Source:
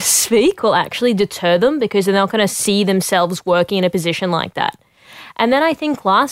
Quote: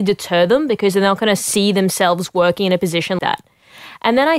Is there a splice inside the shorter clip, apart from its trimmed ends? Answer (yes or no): yes